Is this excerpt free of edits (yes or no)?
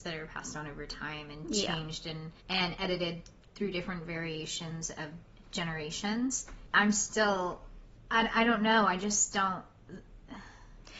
no